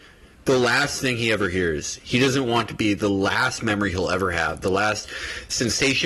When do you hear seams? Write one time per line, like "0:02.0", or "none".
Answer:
none

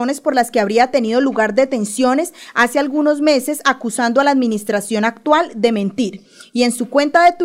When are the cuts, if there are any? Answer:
none

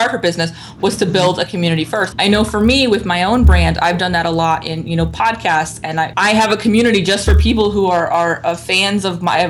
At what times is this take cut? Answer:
0:02.1
0:06.1

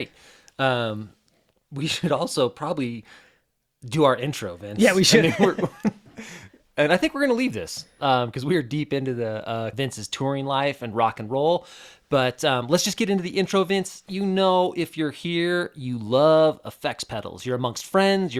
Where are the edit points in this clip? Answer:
0:09.7

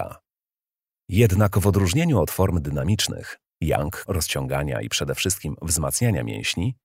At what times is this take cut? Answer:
0:00.9
0:04.1

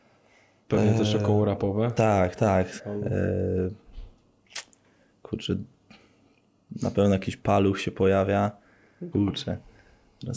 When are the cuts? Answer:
0:02.8
0:09.1

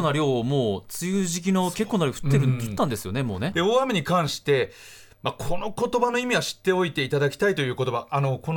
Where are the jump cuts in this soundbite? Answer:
0:03.5

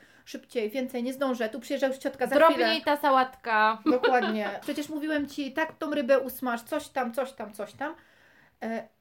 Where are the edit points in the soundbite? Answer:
0:04.6

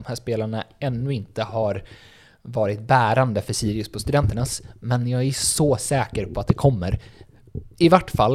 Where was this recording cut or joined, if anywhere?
none

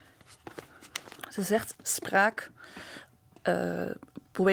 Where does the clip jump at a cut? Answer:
0:01.7

